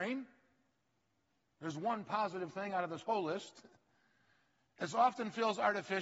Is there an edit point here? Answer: no; 0 cuts

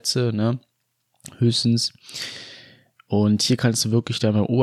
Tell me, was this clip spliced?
no; 0 cuts

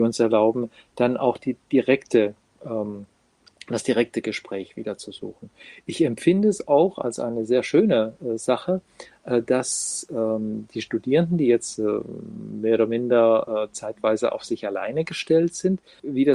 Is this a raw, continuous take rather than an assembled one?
yes; 0 cuts

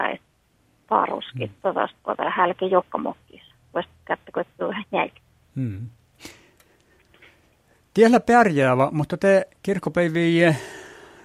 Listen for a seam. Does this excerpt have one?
no; 0 cuts

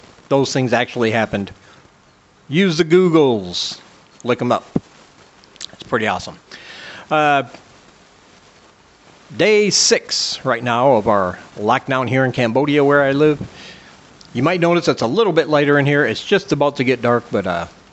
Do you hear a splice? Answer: no; 0 cuts

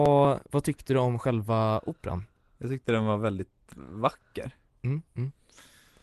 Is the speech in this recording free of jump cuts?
no; 1 cut; at 5.1 s

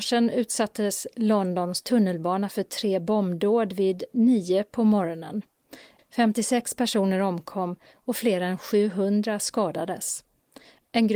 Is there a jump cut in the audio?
yes; 1 cut; at 6.0 s

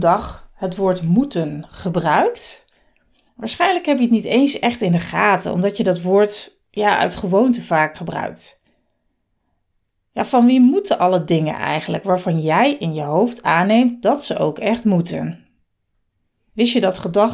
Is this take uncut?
no; 1 cut; at 7.9 s

